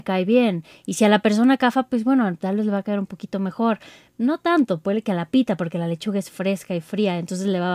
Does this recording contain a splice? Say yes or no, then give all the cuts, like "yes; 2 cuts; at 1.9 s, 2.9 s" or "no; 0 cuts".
no; 0 cuts